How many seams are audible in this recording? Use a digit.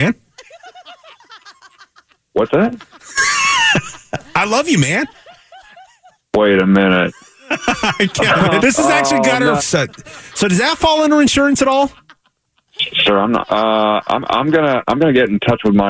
3